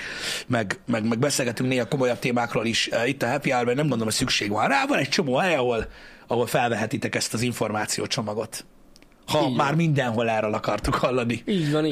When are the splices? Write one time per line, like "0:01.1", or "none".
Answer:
none